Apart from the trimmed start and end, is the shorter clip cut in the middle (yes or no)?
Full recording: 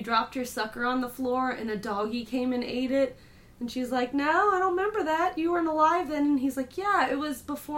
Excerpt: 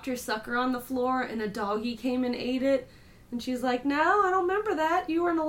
no